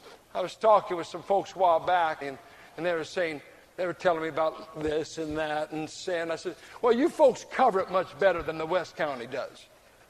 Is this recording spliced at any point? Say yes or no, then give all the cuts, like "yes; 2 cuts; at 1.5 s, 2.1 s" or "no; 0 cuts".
yes; 1 cut; at 2.2 s